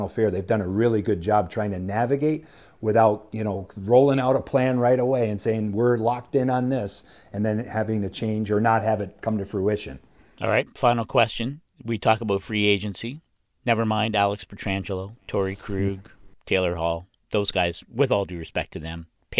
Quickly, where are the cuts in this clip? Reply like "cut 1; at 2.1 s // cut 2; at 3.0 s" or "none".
none